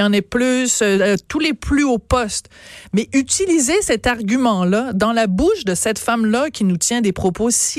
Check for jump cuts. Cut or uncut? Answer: uncut